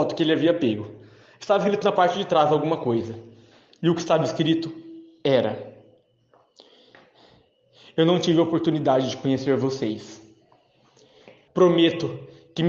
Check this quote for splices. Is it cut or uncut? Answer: cut